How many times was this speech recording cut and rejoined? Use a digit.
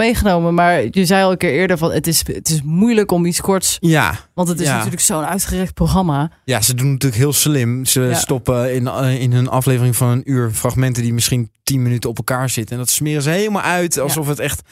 0